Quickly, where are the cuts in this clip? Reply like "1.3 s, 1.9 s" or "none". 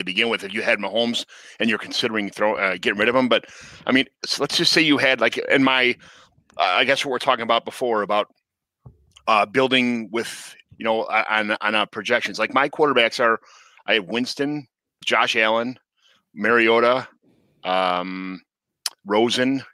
15.0 s